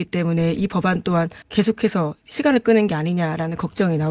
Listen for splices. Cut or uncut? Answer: cut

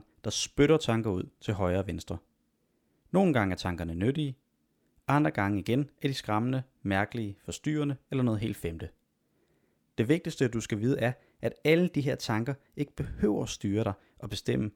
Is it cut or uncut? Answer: uncut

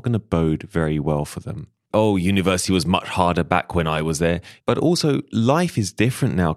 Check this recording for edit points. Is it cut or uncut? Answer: cut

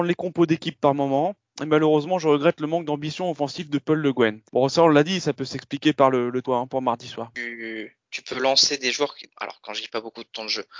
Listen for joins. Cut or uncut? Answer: cut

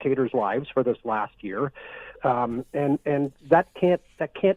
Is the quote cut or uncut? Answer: cut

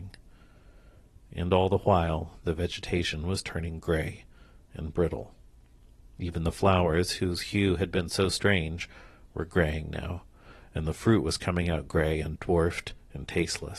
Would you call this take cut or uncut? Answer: uncut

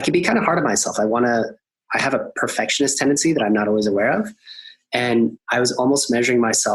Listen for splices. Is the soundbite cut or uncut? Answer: uncut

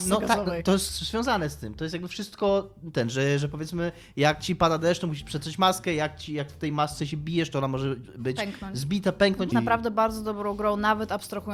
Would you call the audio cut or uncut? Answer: cut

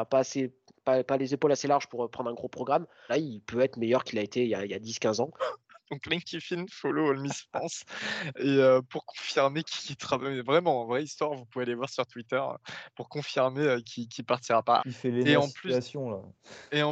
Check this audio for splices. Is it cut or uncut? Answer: cut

